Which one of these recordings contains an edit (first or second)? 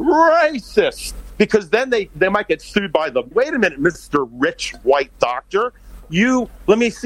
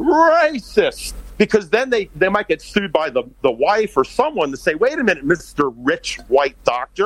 first